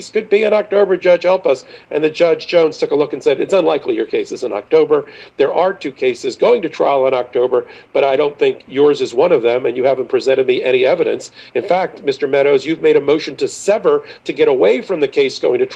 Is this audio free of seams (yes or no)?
yes